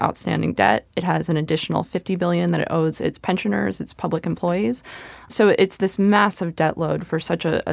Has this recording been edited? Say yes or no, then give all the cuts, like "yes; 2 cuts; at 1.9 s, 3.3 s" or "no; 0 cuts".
no; 0 cuts